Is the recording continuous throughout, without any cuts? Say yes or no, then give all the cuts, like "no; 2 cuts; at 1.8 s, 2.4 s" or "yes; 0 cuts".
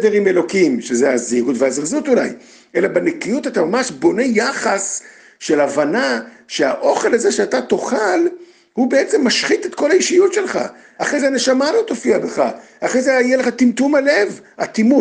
yes; 0 cuts